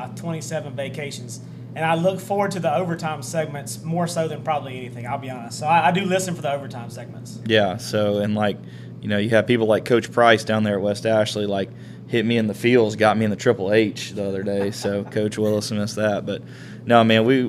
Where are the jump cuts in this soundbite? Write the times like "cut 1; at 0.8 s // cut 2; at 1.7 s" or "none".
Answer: none